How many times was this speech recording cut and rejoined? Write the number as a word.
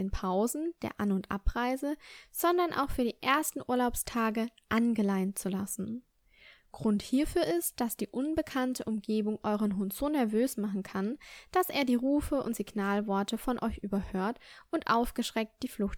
zero